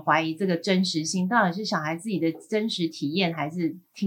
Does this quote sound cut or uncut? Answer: uncut